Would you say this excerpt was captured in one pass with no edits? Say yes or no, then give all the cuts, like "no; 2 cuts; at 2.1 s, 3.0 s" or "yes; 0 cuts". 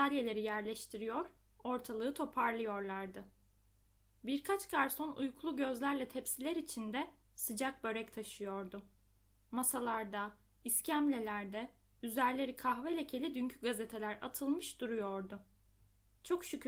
yes; 0 cuts